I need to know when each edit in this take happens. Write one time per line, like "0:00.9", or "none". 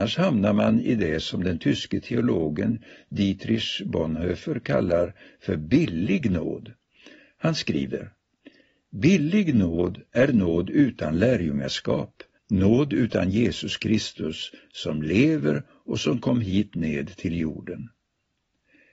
0:12.3

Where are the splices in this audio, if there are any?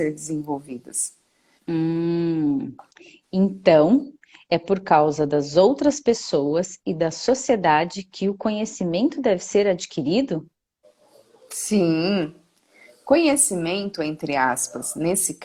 0:01.6

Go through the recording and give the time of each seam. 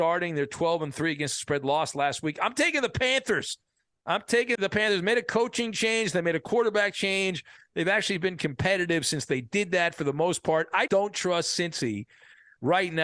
0:04.6
0:10.9

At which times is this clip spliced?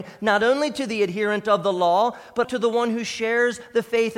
0:02.4

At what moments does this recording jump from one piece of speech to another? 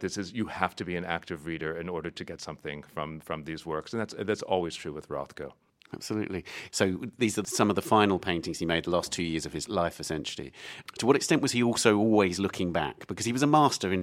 0:06.7

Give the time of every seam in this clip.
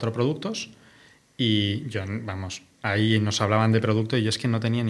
none

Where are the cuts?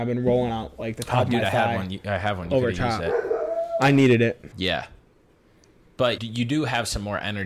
0:04.5
0:06.2

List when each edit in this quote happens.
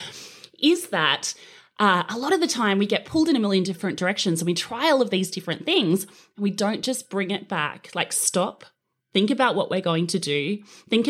none

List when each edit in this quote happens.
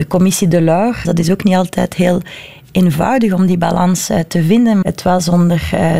0:01.0
0:04.8

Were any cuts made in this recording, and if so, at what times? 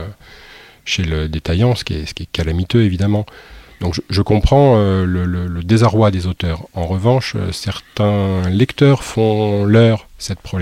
none

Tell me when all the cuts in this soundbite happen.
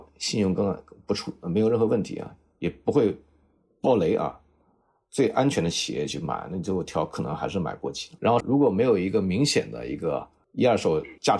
0:08.4

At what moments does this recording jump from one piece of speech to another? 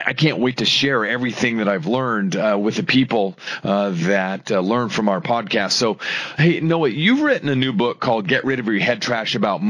none

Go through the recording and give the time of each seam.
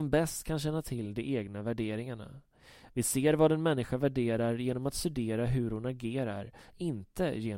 none

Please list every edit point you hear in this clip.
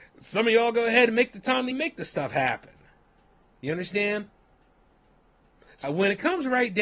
0:01.7
0:03.4
0:05.8

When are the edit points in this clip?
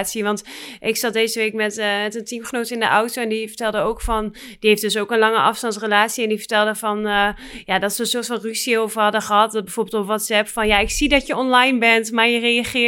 none

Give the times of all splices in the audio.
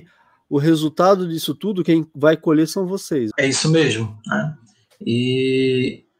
0:03.3

